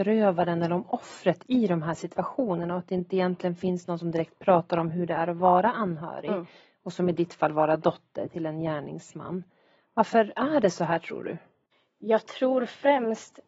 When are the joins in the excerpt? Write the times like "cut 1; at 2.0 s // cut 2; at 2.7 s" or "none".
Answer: none